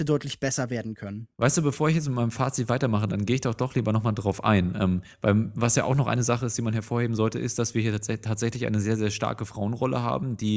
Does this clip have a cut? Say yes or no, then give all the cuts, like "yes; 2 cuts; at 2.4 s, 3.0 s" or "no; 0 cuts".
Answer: yes; 1 cut; at 1.3 s